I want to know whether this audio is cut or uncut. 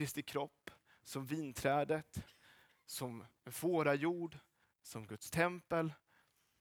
cut